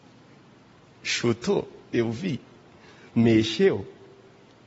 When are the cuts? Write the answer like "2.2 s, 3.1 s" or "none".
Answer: none